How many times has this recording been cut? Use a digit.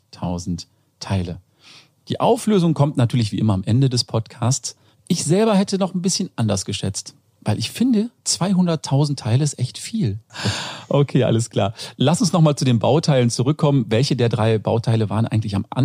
2